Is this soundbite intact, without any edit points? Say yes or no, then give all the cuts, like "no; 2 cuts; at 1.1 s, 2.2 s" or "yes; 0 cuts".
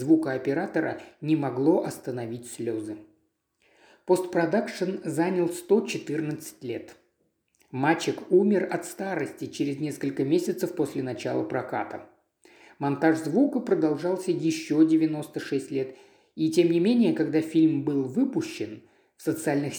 yes; 0 cuts